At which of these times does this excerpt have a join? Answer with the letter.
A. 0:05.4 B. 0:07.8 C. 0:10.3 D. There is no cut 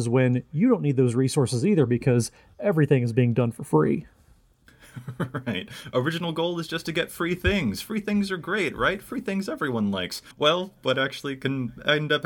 C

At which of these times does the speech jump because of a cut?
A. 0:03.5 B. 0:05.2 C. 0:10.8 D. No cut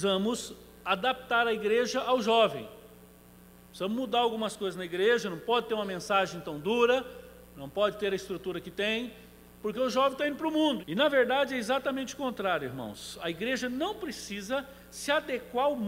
C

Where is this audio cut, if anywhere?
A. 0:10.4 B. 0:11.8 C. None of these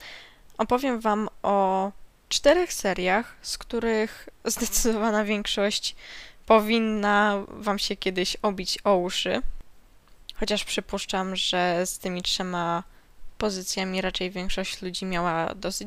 C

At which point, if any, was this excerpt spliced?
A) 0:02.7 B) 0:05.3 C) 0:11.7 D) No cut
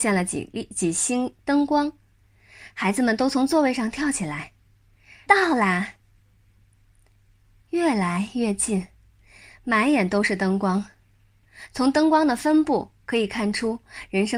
B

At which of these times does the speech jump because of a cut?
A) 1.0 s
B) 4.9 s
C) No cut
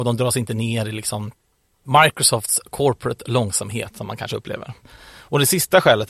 C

